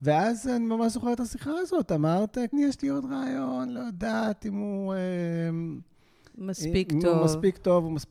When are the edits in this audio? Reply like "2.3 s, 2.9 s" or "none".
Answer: 2.5 s, 3.7 s